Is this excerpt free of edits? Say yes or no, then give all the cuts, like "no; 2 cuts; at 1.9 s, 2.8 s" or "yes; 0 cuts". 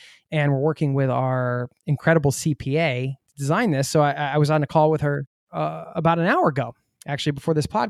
yes; 0 cuts